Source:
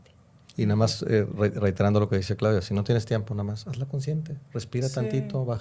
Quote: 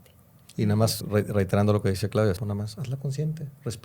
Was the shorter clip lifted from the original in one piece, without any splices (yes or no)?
no